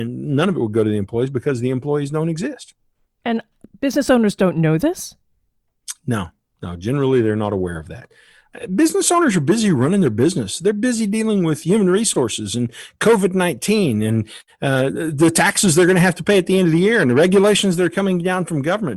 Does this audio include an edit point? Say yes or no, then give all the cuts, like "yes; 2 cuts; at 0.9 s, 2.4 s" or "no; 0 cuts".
no; 0 cuts